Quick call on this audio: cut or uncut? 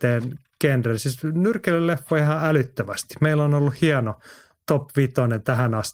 uncut